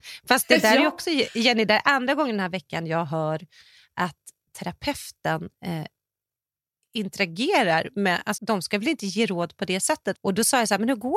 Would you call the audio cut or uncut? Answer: cut